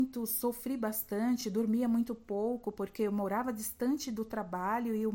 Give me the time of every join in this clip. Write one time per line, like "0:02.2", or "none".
none